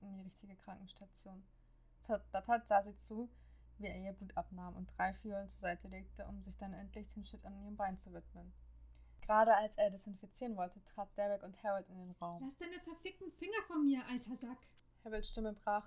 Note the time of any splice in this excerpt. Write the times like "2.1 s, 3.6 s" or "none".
2.0 s